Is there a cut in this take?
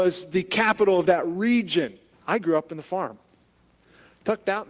yes; 1 cut; at 2.1 s

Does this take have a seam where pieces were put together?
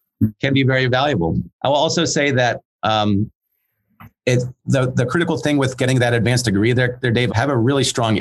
yes; 2 cuts; at 1.5 s, 7.3 s

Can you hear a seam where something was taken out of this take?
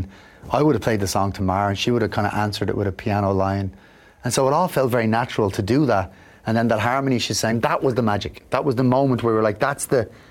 no; 0 cuts

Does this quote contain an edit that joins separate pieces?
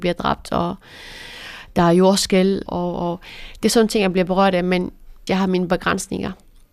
yes; 2 cuts; at 2.7 s, 5.3 s

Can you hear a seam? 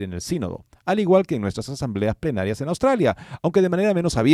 no; 0 cuts

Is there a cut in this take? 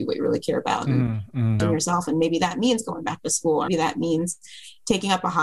yes; 2 cuts; at 1.6 s, 3.7 s

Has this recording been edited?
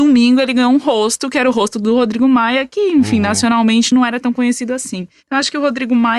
no; 0 cuts

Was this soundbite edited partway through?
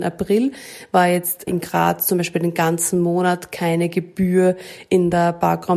yes; 1 cut; at 1.5 s

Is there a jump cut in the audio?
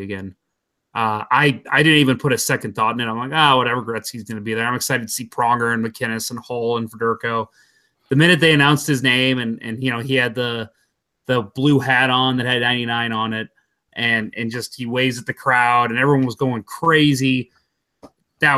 no; 0 cuts

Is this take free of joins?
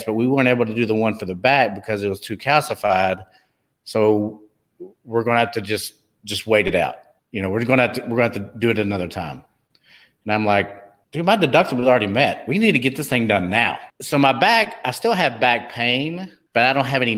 yes; 0 cuts

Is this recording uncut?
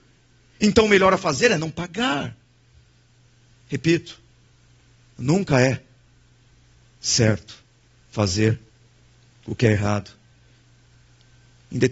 yes; 0 cuts

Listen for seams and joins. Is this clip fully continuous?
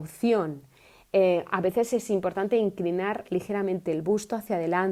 yes; 0 cuts

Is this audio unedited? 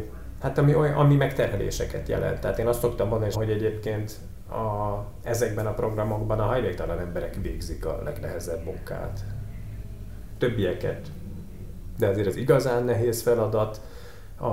no; 2 cuts; at 3.3 s, 12.0 s

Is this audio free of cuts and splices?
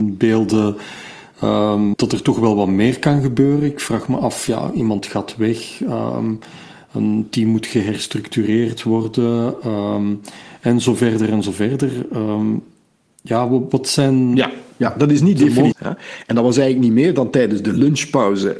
no; 2 cuts; at 1.9 s, 15.7 s

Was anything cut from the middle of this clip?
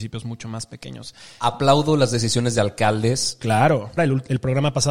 yes; 1 cut; at 4.0 s

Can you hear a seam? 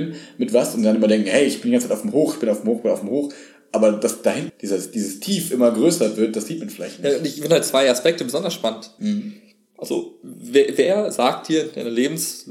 yes; 2 cuts; at 4.5 s, 9.0 s

